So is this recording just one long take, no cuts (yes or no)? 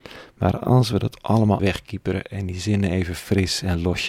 no